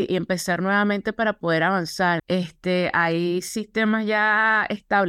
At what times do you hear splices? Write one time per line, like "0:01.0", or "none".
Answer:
0:02.2